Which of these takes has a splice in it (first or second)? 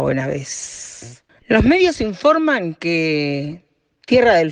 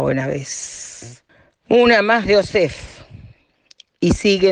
first